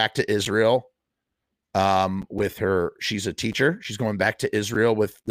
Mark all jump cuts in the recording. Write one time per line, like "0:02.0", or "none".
none